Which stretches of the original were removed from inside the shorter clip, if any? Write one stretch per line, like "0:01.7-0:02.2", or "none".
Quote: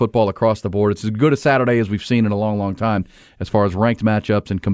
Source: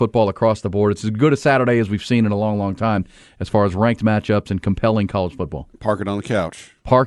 none